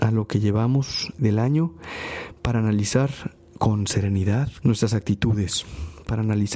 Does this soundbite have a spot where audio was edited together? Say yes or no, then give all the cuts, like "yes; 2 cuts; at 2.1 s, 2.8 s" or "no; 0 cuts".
yes; 2 cuts; at 1.2 s, 4.6 s